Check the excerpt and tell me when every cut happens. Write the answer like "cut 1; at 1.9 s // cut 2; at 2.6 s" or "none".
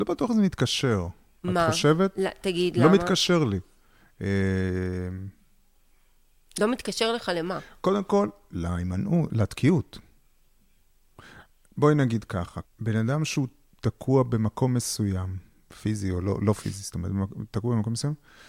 cut 1; at 12.6 s